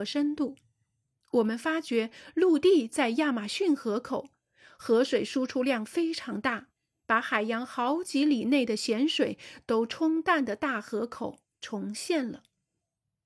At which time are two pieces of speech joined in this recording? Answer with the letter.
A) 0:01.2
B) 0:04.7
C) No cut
A